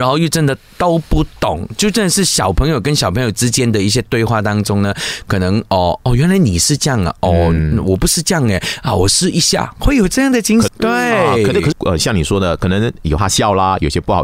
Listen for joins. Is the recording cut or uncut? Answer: cut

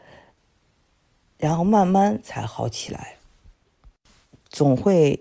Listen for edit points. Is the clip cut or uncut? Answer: uncut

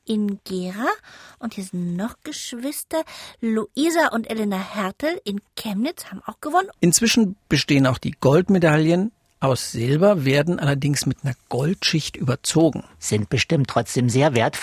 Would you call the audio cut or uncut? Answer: cut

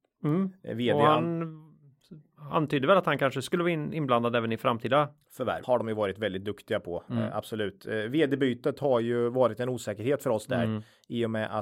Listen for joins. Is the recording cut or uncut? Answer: cut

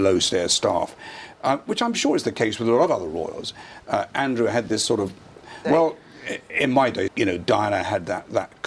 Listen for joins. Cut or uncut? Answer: cut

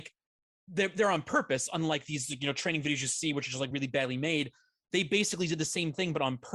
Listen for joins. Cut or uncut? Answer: uncut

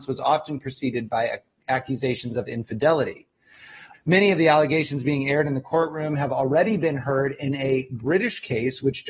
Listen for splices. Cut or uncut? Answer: cut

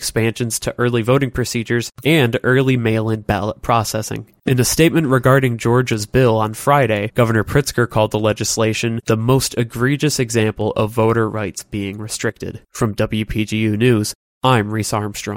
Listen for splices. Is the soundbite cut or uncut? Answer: cut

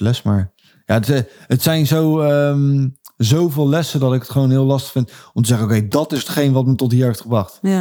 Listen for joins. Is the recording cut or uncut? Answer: uncut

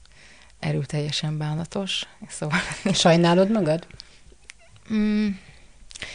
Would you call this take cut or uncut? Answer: uncut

